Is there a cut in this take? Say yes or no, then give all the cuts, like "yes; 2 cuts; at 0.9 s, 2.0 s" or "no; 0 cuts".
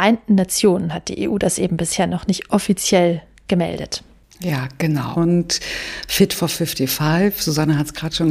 yes; 1 cut; at 5.1 s